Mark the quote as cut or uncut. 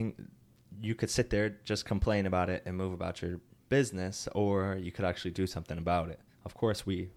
uncut